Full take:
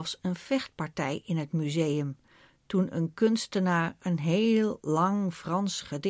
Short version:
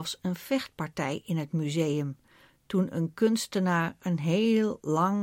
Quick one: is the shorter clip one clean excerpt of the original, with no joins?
yes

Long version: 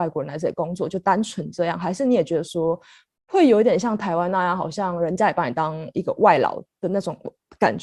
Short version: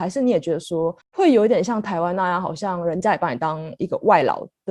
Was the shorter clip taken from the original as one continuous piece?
no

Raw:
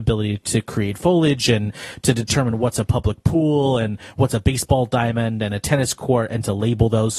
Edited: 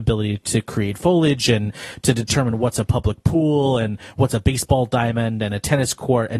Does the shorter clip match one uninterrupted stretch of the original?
yes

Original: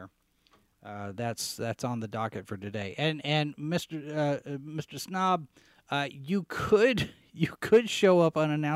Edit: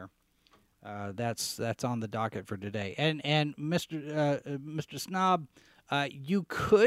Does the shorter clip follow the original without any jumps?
yes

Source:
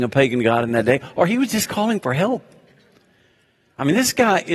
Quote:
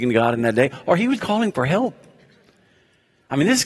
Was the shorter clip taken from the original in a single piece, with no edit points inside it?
no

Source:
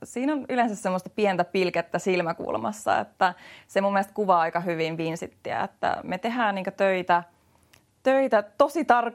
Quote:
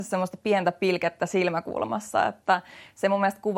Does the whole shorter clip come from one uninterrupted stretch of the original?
yes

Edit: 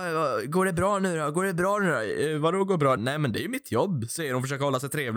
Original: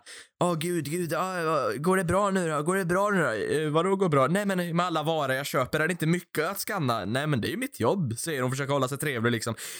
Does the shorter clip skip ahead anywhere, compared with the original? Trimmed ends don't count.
yes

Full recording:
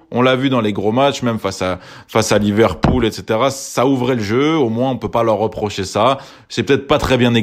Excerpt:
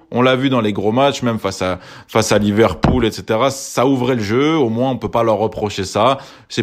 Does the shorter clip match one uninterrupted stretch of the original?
yes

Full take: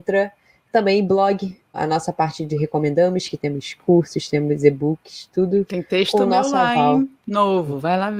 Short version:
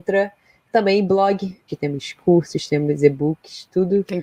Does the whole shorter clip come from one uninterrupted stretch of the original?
no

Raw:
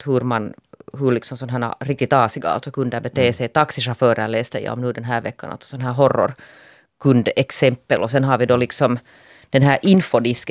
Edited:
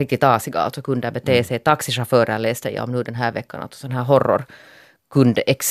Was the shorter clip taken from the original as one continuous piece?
yes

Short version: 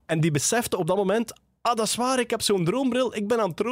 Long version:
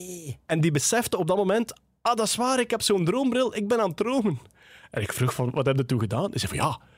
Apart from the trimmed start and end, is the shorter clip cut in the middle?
no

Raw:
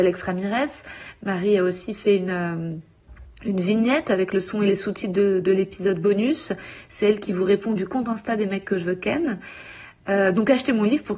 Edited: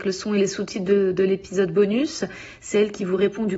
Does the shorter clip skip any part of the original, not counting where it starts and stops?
no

